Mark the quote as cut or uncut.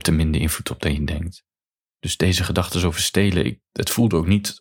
uncut